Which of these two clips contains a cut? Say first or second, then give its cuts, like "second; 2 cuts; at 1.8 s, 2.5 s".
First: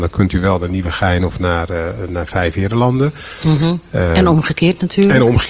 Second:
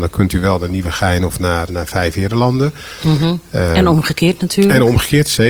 second; 1 cut; at 1.7 s